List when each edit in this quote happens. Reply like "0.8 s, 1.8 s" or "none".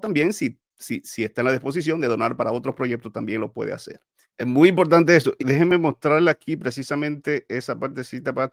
4.3 s, 5.4 s